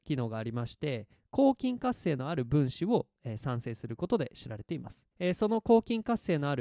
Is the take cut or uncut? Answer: cut